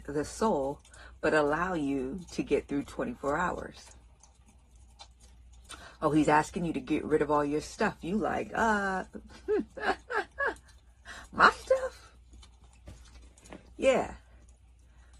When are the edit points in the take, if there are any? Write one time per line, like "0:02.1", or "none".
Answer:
none